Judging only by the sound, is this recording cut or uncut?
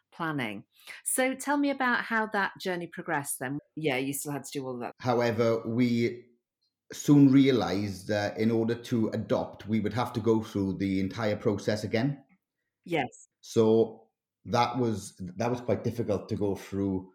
cut